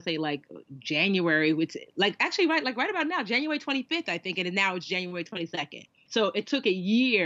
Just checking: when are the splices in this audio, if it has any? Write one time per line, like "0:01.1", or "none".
0:06.1